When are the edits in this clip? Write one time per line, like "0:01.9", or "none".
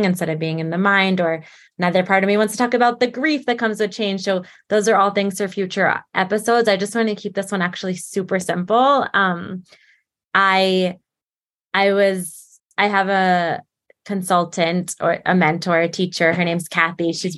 none